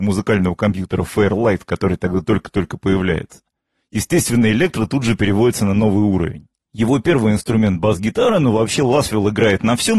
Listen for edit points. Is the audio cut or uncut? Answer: cut